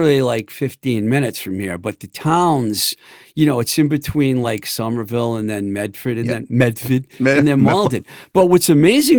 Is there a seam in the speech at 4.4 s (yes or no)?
no